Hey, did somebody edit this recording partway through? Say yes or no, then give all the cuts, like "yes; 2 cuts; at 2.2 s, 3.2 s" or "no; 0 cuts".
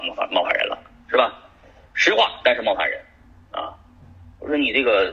no; 0 cuts